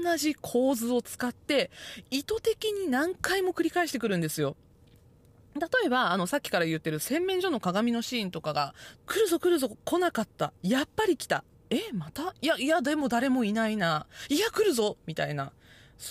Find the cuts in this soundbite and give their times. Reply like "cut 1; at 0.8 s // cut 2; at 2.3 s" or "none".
cut 1; at 9.0 s